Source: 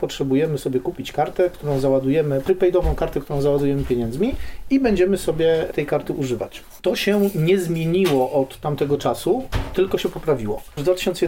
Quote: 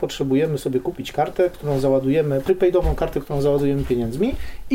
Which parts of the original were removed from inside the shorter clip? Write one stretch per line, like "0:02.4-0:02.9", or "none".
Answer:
none

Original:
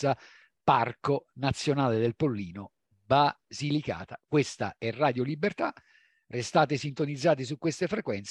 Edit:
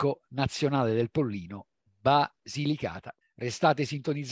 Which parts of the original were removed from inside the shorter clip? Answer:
0:04.3-0:06.1

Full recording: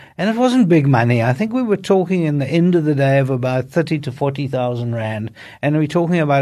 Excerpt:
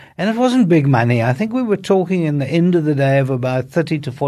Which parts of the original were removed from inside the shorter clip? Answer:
none

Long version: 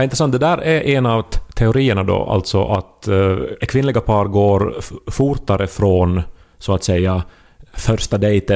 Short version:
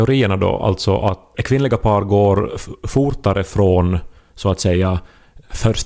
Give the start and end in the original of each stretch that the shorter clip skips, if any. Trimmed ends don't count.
0:03.0-0:03.6

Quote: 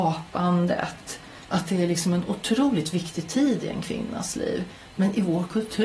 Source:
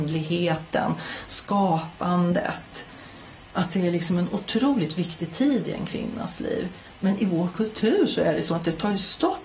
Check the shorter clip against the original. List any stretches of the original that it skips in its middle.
0:03.1-0:03.5

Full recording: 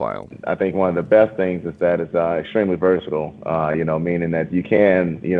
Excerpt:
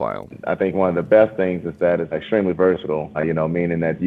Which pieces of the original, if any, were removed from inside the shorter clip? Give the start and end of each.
0:02.1-0:02.3
0:03.4-0:03.7

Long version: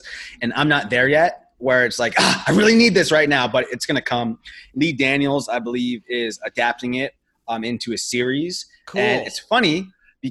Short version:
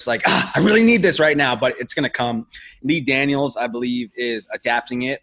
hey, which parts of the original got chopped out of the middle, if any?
none

